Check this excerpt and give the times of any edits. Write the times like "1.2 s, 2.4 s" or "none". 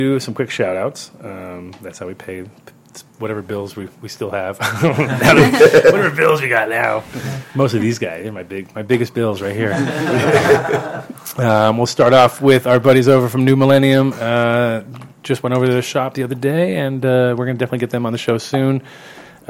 none